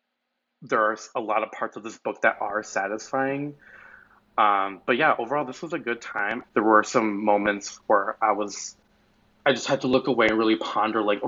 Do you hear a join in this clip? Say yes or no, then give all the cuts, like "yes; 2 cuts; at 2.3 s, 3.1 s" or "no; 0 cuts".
yes; 1 cut; at 6.4 s